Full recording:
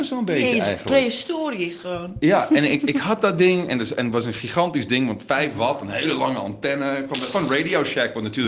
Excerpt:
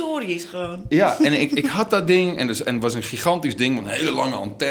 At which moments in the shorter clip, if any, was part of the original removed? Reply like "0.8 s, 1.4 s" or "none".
3.8 s